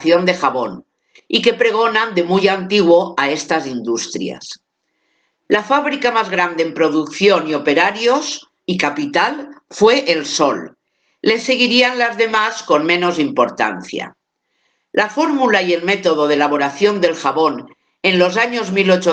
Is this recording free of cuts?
yes; 0 cuts

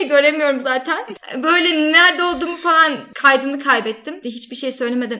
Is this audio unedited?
no; 1 cut; at 4.2 s

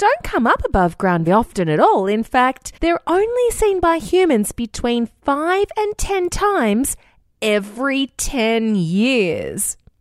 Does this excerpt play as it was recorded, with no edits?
no; 2 cuts; at 1.3 s, 2.8 s

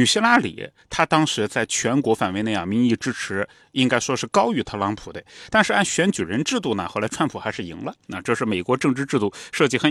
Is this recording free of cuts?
yes; 0 cuts

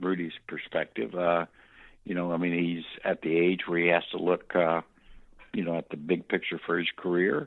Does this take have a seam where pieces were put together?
no; 0 cuts

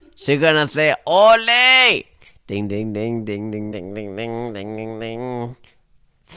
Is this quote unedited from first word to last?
no; 1 cut; at 3.7 s

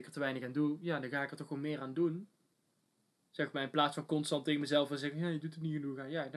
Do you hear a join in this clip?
no; 0 cuts

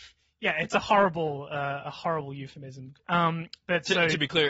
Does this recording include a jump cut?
yes; 1 cut; at 3.0 s

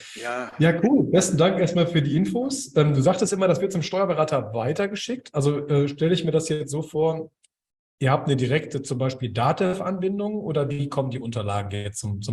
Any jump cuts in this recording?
no; 0 cuts

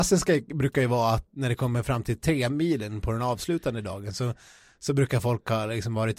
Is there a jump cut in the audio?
yes; 1 cut; at 1.3 s

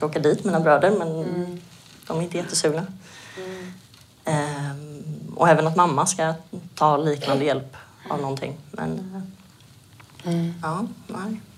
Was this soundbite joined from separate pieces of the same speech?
no; 0 cuts

